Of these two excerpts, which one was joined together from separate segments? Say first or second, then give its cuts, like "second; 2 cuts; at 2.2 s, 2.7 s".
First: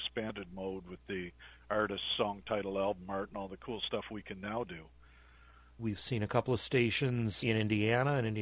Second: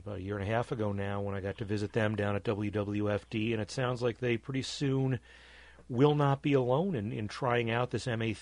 first; 2 cuts; at 5.8 s, 7.4 s